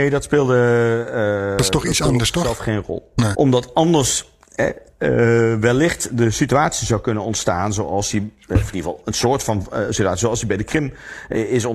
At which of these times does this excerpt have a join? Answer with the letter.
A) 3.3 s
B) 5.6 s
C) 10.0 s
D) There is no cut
A